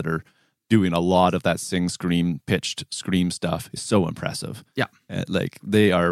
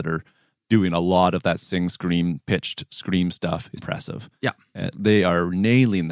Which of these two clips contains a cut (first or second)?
second